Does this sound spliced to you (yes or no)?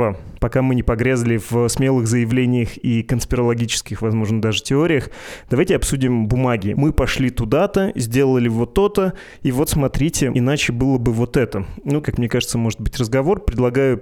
yes